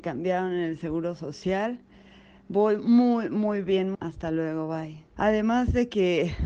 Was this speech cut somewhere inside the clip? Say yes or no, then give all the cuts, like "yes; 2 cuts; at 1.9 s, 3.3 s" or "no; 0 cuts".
yes; 2 cuts; at 3.9 s, 5.2 s